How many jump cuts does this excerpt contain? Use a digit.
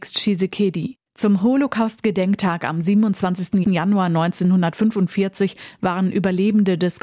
2